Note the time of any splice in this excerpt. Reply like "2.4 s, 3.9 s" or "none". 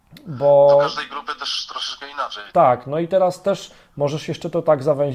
2.5 s

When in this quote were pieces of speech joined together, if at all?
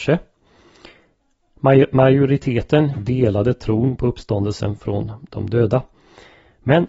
2.9 s

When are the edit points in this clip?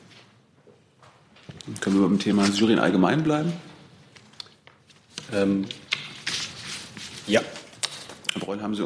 none

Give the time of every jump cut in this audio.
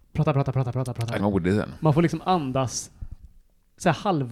1.2 s

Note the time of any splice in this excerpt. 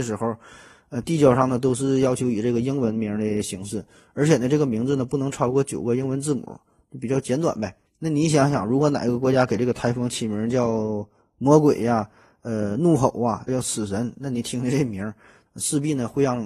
7.9 s, 13.5 s, 15.5 s

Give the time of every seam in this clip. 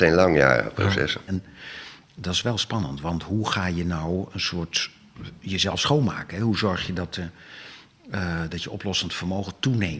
1.3 s

